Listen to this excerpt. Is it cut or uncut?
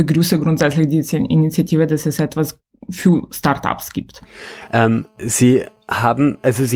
uncut